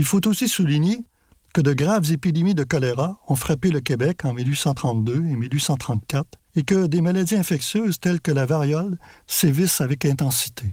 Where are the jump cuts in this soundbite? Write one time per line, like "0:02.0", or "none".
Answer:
0:06.5